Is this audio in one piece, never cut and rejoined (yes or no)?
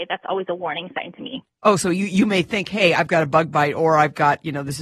yes